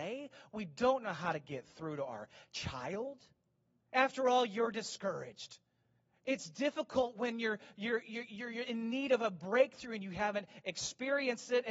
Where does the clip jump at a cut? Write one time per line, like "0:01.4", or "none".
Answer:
0:03.8
0:06.1